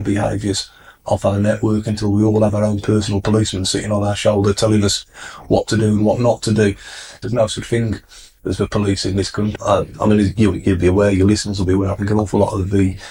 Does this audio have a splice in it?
yes; 2 cuts; at 7.2 s, 9.6 s

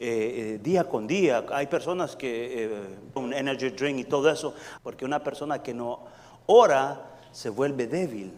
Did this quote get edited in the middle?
yes; 2 cuts; at 3.2 s, 4.8 s

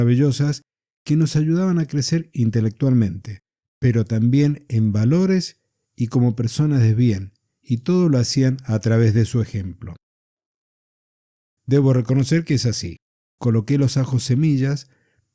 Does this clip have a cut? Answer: yes; 2 cuts; at 11.6 s, 13.2 s

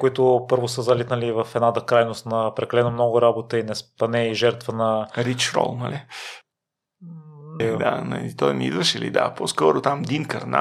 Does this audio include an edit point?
yes; 1 cut; at 7.6 s

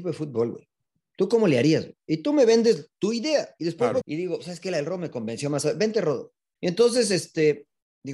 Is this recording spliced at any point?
yes; 2 cuts; at 4.0 s, 6.6 s

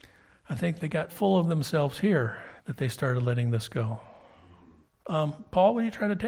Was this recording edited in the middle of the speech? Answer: yes; 3 cuts; at 1.1 s, 2.6 s, 4.8 s

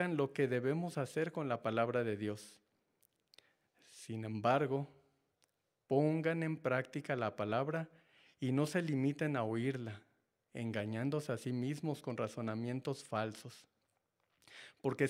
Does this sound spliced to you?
no; 0 cuts

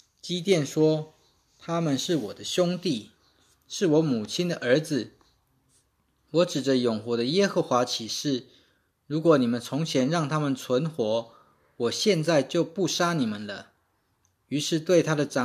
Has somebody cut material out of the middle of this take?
no; 0 cuts

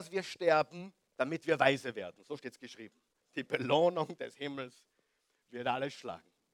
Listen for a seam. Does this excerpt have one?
yes; 1 cut; at 3.2 s

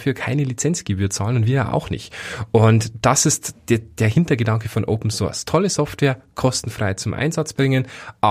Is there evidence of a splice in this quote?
no; 0 cuts

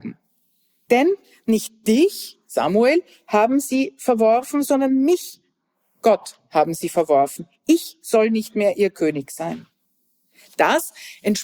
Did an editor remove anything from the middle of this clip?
no; 0 cuts

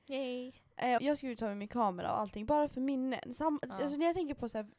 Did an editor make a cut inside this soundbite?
yes; 1 cut; at 1.0 s

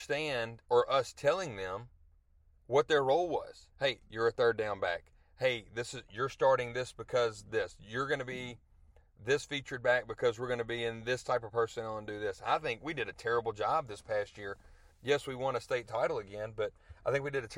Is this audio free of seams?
no; 1 cut; at 3.7 s

